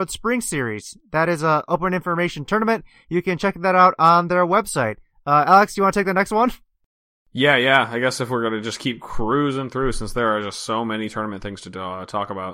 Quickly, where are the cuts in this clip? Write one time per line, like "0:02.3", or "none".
none